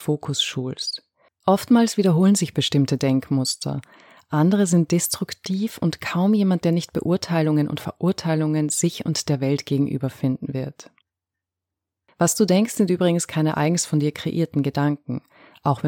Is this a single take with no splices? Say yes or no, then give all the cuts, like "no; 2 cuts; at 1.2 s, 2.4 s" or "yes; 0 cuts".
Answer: no; 1 cut; at 1.3 s